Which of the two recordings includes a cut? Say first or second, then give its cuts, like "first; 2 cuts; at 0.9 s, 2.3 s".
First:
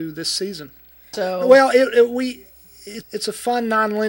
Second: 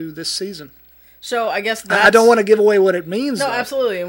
first; 2 cuts; at 1.1 s, 3.0 s